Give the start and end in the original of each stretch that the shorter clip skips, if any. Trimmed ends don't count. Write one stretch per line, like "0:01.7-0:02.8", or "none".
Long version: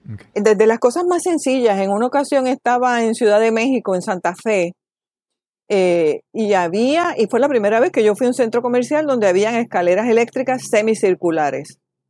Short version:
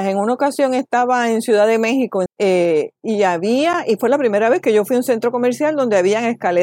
0:04.0-0:05.6